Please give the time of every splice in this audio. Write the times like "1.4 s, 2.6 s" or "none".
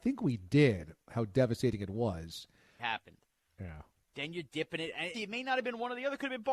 2.8 s, 4.0 s, 5.1 s